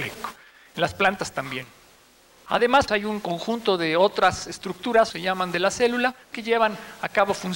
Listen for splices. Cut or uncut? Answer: cut